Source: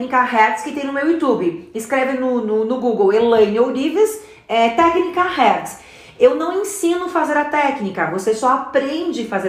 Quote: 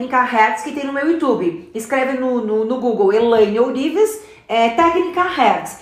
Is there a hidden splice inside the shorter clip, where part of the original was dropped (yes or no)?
no